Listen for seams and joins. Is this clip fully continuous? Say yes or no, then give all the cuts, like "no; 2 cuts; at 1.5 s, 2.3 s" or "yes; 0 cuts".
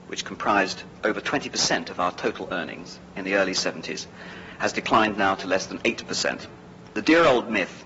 no; 1 cut; at 6.9 s